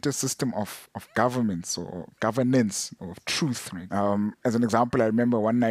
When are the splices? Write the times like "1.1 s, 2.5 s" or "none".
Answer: 3.9 s